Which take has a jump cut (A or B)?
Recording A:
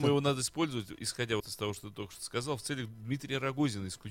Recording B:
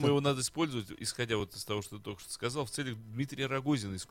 A